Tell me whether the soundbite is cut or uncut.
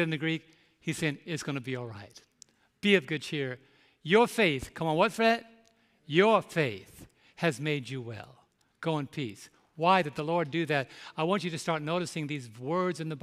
uncut